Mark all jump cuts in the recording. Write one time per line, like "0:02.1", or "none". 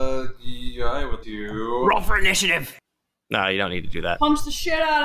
0:01.2